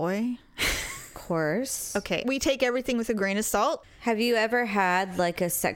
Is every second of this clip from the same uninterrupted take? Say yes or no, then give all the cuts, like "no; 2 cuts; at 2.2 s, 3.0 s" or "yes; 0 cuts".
no; 2 cuts; at 2.2 s, 3.8 s